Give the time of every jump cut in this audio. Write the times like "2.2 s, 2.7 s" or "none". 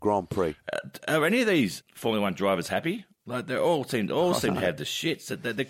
1.8 s